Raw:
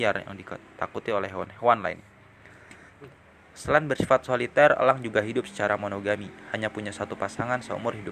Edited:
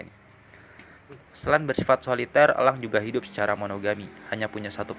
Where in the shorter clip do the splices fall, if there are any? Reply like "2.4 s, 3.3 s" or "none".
1.3 s